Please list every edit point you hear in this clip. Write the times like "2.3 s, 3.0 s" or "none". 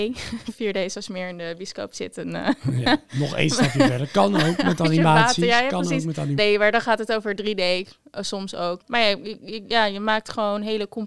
6.4 s, 8.8 s